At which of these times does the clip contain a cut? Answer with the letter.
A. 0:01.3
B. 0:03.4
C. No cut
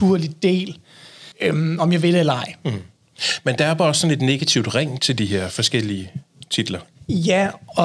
A